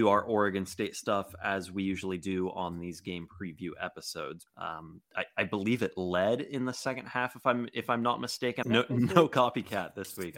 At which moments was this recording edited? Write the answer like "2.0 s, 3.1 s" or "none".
4.5 s, 8.6 s

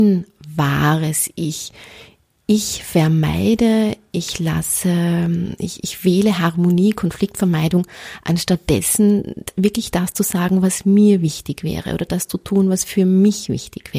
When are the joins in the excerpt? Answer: none

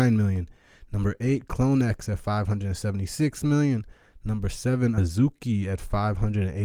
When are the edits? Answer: none

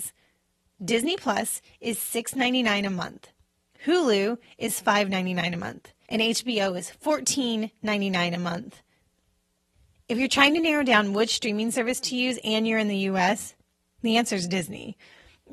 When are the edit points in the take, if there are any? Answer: 6.1 s

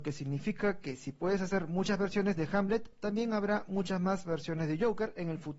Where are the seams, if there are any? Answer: none

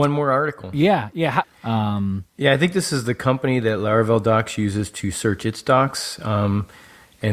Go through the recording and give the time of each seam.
1.4 s

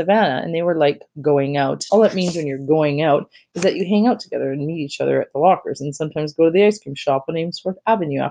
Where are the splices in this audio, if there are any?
1.9 s

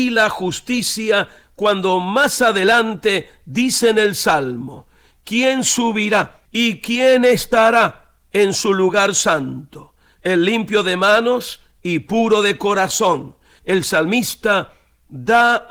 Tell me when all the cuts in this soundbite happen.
6.5 s, 13.6 s

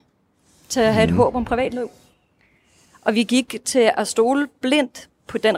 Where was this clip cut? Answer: none

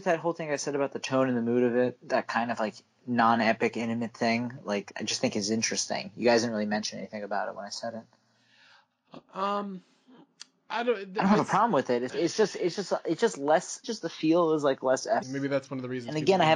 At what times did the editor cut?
12.1 s, 13.8 s, 15.2 s

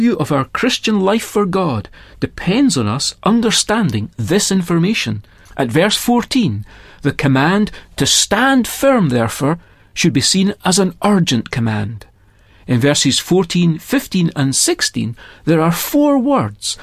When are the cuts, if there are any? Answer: 5.5 s

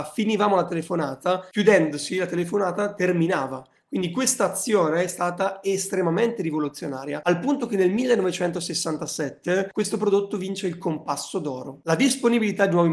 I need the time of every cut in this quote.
none

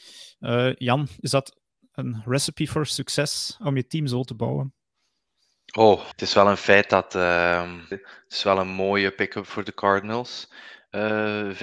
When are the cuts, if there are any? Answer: 6.1 s, 7.9 s

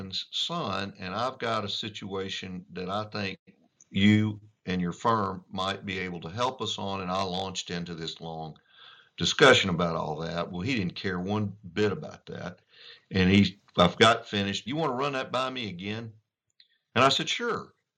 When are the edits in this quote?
14.7 s

